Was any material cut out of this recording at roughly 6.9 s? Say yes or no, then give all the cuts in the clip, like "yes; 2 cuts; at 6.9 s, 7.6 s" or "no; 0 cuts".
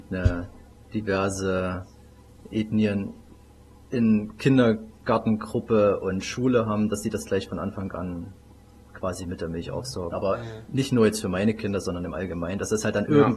no; 1 cut; at 10.1 s